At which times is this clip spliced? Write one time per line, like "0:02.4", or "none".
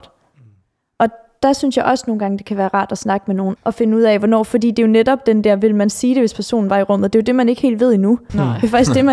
0:03.6